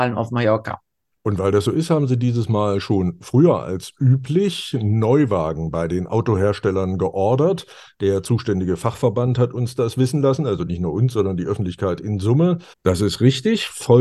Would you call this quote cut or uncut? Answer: cut